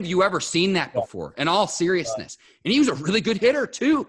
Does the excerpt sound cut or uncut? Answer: uncut